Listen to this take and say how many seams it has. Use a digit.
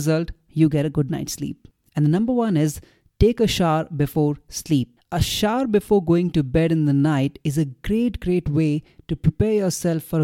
1